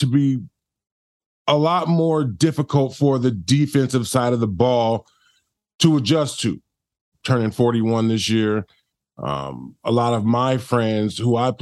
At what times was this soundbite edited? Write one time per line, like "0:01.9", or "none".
0:07.1